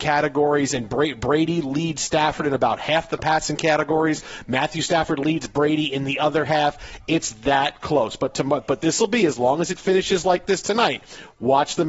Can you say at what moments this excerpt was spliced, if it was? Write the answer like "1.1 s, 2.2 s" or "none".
none